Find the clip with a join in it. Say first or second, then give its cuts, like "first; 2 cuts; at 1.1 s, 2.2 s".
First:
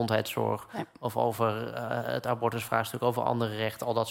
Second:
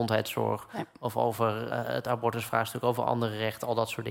second; 1 cut; at 1.7 s